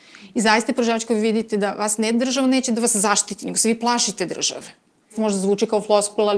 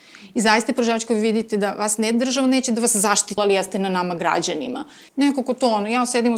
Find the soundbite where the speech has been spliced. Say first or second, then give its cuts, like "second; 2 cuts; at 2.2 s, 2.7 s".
second; 2 cuts; at 3.4 s, 5.1 s